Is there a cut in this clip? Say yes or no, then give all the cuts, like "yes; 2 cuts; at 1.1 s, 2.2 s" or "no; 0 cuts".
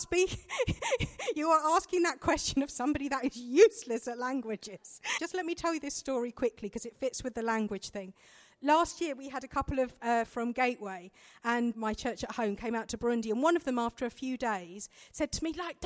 yes; 3 cuts; at 5.2 s, 10.3 s, 11.7 s